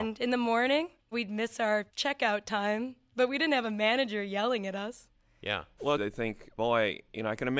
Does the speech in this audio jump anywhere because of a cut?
yes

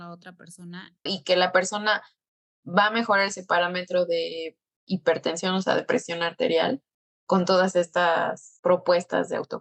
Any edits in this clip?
yes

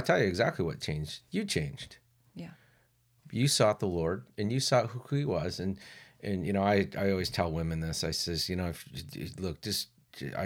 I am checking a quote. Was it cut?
no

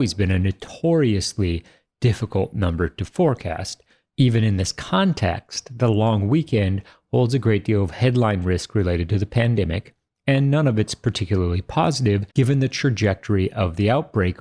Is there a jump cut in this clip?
yes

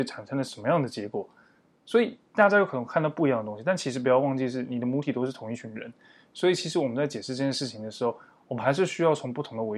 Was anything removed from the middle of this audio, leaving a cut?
no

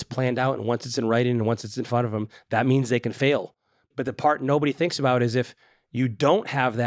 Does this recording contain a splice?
no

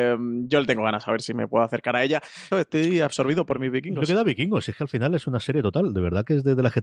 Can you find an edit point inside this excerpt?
yes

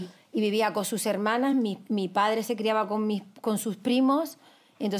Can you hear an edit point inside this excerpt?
no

